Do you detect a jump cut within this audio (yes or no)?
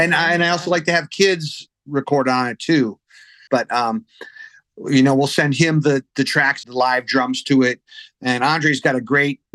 yes